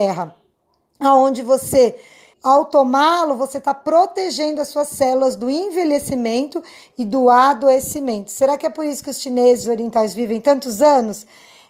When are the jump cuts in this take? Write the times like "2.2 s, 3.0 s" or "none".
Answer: 2.3 s, 9.6 s